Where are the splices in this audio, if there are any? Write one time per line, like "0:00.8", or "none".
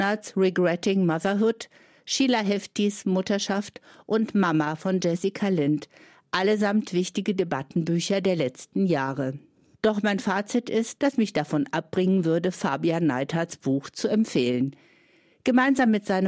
0:09.7
0:11.0